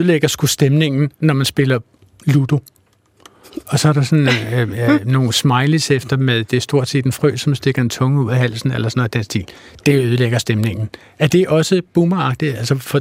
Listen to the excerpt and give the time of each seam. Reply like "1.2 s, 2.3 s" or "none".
none